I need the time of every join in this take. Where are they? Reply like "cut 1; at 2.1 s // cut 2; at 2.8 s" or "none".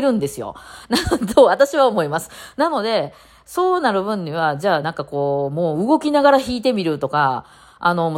none